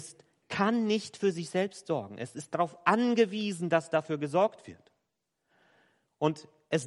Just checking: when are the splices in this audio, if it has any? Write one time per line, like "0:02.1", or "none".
none